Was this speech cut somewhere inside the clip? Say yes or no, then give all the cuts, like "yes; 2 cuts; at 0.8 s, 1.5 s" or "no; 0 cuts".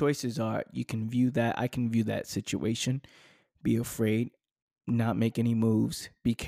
no; 0 cuts